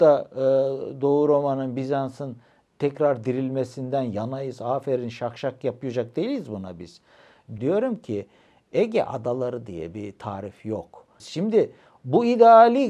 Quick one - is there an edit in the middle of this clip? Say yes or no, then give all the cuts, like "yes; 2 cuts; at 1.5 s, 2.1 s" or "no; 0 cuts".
yes; 2 cuts; at 7.6 s, 11.2 s